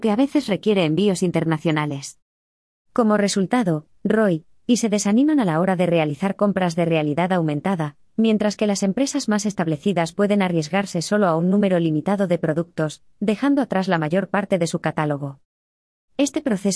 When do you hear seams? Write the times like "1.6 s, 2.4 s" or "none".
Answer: 4.0 s